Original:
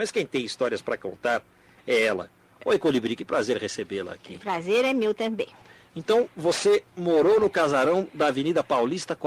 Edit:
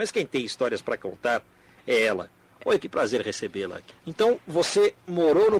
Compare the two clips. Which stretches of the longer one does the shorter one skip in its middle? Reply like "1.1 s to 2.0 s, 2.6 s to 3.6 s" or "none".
2.8 s to 3.2 s, 4.3 s to 5.8 s